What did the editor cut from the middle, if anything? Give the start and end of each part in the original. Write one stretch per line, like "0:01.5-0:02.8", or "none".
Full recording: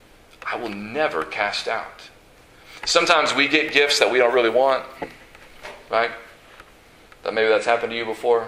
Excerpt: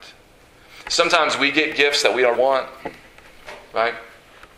0:04.3-0:04.5